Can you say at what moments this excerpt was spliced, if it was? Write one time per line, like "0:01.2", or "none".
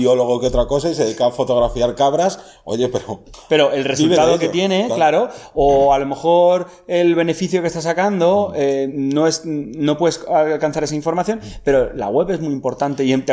none